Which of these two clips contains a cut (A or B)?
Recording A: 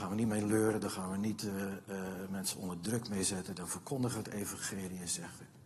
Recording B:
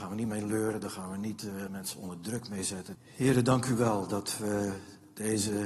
B